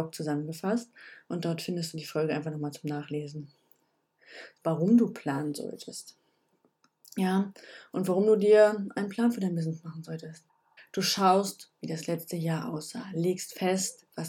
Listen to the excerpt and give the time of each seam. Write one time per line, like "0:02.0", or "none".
0:04.6
0:10.8